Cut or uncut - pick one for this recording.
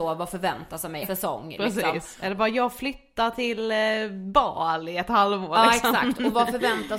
cut